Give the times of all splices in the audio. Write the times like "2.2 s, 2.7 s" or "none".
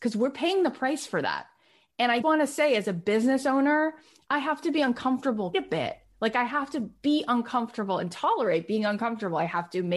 2.2 s, 5.5 s